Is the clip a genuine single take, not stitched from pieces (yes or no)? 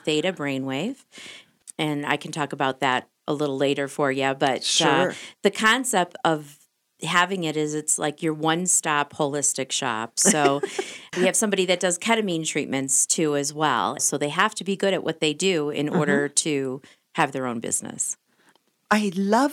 no